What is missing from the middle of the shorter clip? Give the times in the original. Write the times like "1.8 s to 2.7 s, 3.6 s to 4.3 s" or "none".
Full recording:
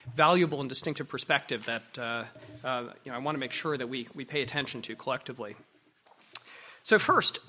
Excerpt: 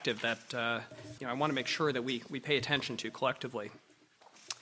2.6 s to 3.0 s